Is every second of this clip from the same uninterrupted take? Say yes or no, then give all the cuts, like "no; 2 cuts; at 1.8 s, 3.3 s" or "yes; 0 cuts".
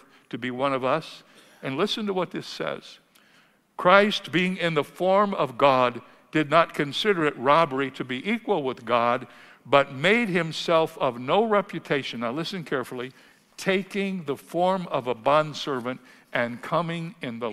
yes; 0 cuts